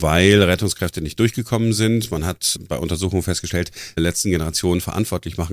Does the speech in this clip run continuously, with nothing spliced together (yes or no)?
no